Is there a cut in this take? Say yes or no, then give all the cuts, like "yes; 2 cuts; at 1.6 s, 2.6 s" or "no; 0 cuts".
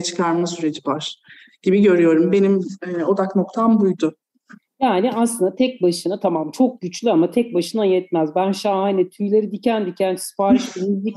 no; 0 cuts